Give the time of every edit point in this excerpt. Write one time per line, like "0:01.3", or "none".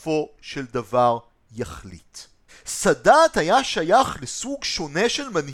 0:02.5